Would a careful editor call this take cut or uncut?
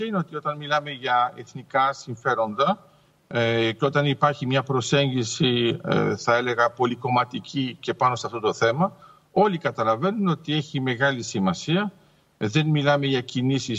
uncut